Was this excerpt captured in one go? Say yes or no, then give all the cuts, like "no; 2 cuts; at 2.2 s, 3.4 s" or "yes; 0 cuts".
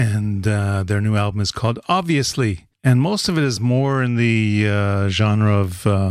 no; 1 cut; at 2.7 s